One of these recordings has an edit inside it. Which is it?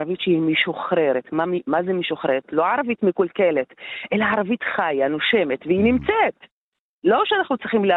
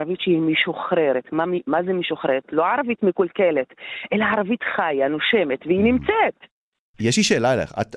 second; 1 cut; at 6.9 s

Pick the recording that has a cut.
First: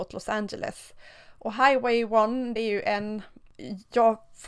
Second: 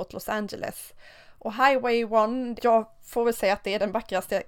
second; 1 cut; at 2.6 s

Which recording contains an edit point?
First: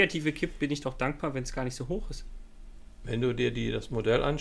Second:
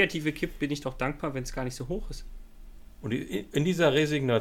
second; 1 cut; at 3.0 s

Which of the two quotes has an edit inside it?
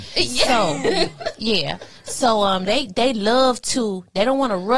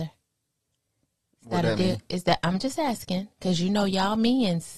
first; 1 cut; at 2.7 s

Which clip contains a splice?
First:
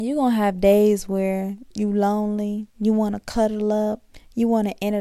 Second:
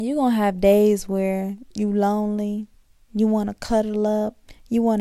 first; 1 cut; at 2.7 s

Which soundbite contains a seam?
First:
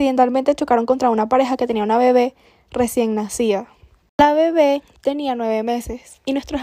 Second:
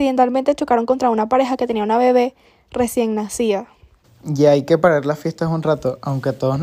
second; 1 cut; at 4.0 s

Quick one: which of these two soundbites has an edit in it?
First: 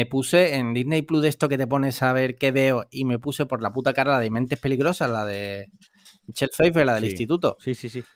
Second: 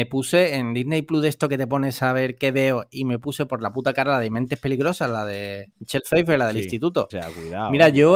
second; 2 cuts; at 5.7 s, 7.1 s

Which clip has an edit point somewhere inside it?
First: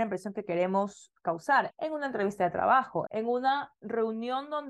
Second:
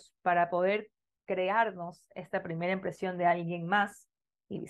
first; 2 cuts; at 1.7 s, 3.1 s

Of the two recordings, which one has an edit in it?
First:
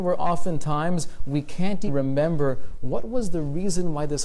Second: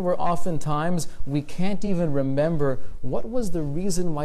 first; 1 cut; at 1.9 s

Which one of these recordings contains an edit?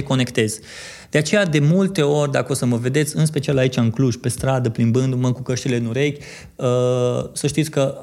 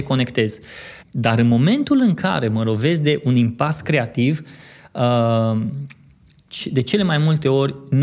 second; 1 cut; at 1.0 s

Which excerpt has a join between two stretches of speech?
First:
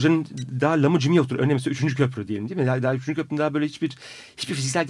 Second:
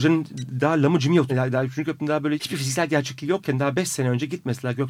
second; 2 cuts; at 1.3 s, 2.4 s

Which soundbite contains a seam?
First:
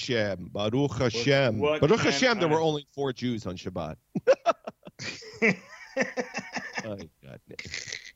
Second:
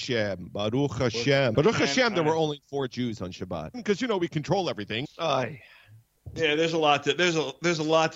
second; 3 cuts; at 1.5 s, 3.7 s, 5.0 s

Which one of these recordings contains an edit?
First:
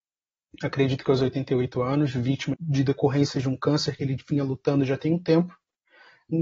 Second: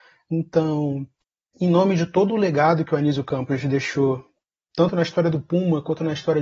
first; 1 cut; at 2.5 s

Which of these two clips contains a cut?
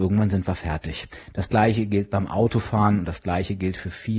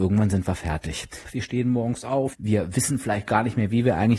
second; 2 cuts; at 1.2 s, 2.3 s

